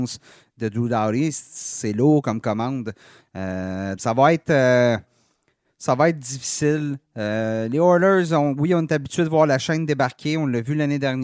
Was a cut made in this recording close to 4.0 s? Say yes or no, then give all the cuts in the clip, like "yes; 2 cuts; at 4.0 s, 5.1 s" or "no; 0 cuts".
yes; 1 cut; at 4.0 s